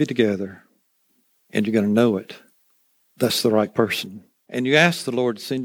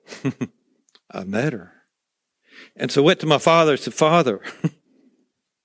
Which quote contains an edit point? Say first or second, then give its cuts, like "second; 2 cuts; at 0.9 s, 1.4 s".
first; 1 cut; at 4.4 s